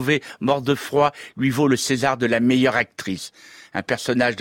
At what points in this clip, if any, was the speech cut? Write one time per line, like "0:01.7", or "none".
none